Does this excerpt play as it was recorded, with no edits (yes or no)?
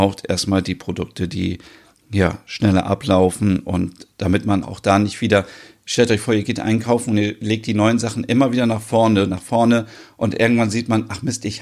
no